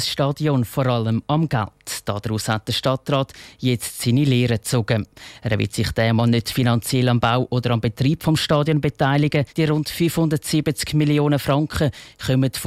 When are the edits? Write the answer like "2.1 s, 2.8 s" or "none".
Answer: 9.5 s